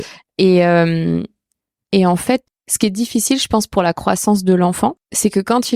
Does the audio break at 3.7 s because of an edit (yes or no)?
no